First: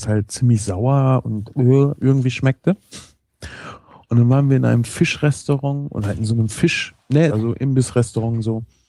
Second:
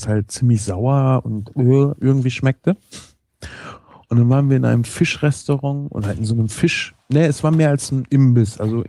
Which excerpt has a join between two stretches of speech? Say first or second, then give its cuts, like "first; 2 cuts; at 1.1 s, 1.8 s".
first; 1 cut; at 7.3 s